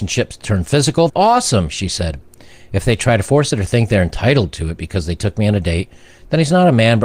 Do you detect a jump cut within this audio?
yes; 1 cut; at 1.1 s

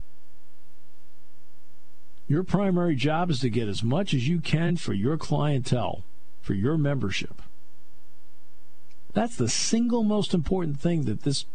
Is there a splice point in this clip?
yes; 1 cut; at 9.1 s

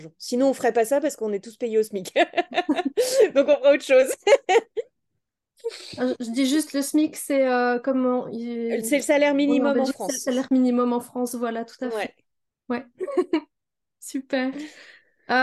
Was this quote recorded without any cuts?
yes; 0 cuts

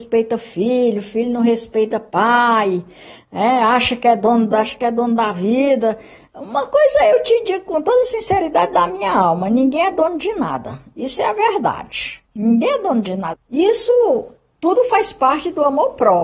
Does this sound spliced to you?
yes; 3 cuts; at 4.5 s, 12.3 s, 13.3 s

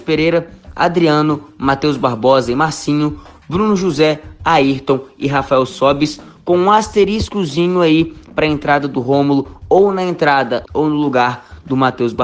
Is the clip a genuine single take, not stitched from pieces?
no; 1 cut; at 10.6 s

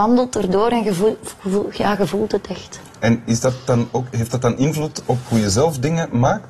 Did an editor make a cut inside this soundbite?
no; 0 cuts

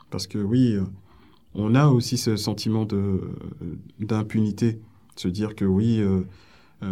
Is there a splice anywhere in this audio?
no; 0 cuts

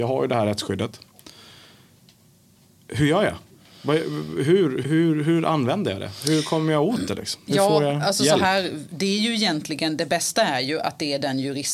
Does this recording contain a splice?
yes; 1 cut; at 4.8 s

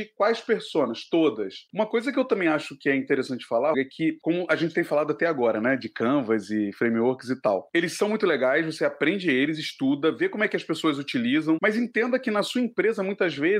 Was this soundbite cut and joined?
yes; 3 cuts; at 1.7 s, 3.7 s, 11.6 s

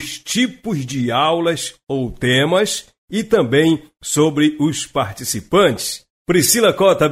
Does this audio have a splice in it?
yes; 1 cut; at 6.1 s

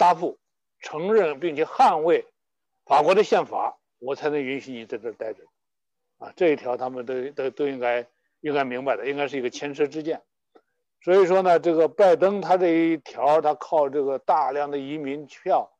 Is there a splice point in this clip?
no; 0 cuts

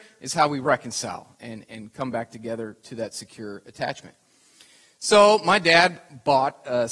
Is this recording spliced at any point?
no; 0 cuts

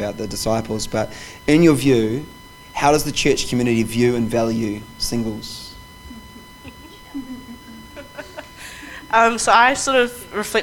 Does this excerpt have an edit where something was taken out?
no; 0 cuts

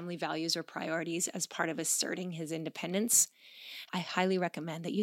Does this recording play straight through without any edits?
no; 1 cut; at 3.9 s

